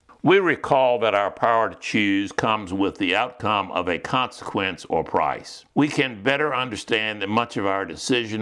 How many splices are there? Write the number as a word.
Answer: one